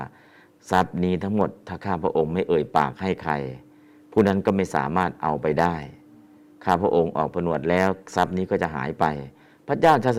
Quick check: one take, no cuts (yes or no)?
yes